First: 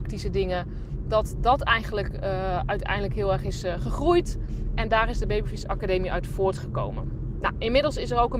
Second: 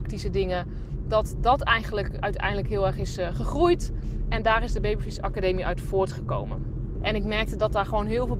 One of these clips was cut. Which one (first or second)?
second